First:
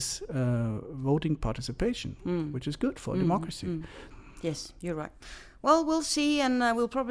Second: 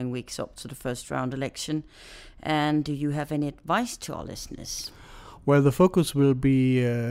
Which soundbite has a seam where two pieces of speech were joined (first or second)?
first